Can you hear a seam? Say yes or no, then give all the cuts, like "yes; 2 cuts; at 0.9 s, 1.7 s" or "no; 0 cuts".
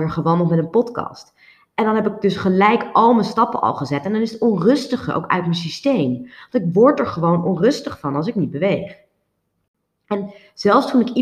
no; 0 cuts